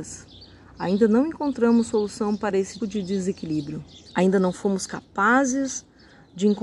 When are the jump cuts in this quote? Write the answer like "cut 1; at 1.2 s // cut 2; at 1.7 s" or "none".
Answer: cut 1; at 2.8 s // cut 2; at 4.1 s